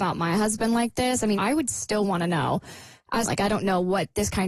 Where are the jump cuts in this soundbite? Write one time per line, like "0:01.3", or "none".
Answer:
0:01.4
0:03.2

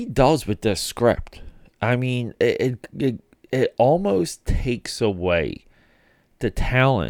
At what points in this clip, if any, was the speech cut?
none

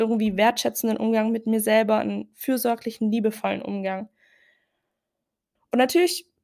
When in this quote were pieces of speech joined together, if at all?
0:05.6

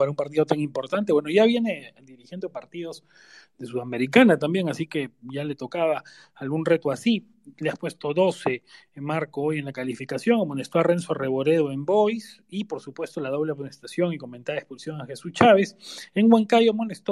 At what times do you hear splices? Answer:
none

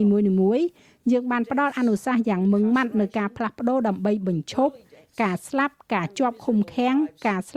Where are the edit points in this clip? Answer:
none

